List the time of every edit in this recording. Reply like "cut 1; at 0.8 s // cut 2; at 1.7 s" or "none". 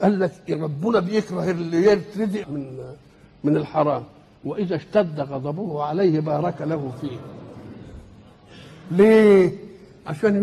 cut 1; at 2.4 s